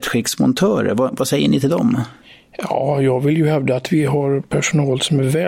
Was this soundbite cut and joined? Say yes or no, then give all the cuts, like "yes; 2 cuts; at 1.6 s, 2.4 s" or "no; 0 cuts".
no; 0 cuts